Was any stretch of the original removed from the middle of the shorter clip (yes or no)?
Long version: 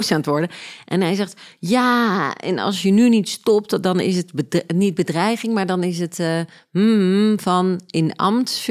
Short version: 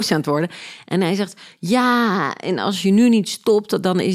no